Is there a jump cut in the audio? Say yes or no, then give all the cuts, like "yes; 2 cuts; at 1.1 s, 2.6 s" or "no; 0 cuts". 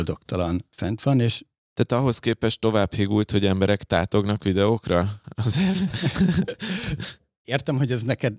no; 0 cuts